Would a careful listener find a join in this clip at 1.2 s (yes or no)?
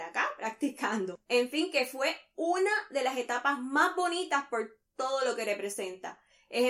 yes